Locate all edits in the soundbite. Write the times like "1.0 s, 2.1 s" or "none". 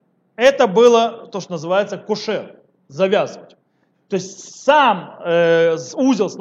3.9 s